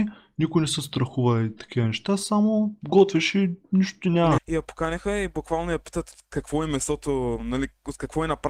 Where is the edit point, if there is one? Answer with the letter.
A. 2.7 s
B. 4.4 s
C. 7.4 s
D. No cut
B